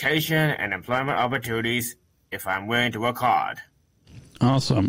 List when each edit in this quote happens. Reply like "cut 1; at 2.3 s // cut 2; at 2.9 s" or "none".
none